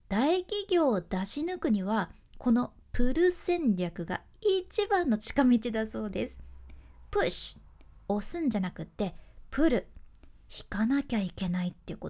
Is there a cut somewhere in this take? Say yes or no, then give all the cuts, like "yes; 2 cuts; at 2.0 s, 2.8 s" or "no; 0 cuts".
no; 0 cuts